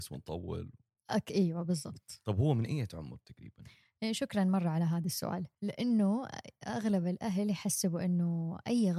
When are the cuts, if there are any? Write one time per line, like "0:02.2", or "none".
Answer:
0:05.5